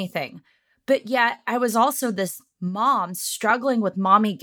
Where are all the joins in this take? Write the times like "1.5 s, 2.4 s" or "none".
none